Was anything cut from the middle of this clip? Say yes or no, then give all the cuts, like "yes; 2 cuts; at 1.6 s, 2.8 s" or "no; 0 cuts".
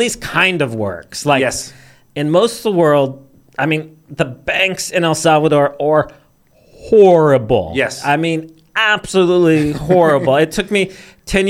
no; 0 cuts